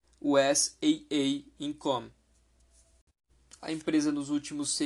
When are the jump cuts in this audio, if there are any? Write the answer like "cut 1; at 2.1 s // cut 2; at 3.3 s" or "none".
cut 1; at 3.6 s